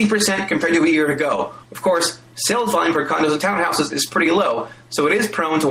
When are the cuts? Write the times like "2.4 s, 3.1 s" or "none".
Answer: 1.6 s

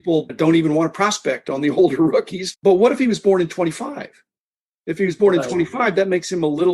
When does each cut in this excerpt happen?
none

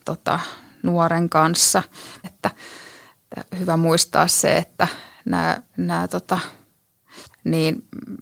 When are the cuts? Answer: 2.2 s, 7.3 s

